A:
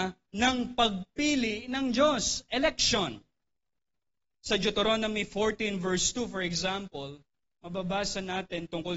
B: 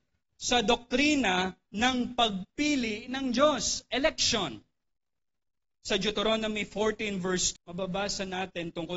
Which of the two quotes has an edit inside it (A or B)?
B